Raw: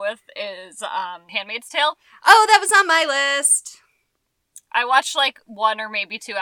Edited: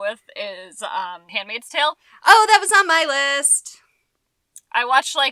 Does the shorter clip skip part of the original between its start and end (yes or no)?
no